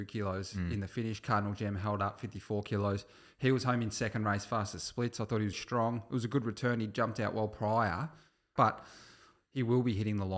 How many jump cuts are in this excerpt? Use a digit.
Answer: 2